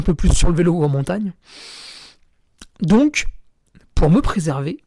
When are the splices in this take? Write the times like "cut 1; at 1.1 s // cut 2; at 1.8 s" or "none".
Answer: none